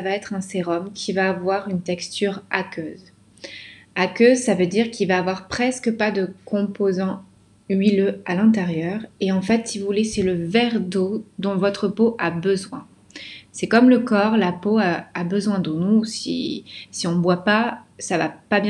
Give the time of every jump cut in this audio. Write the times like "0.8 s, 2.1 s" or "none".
none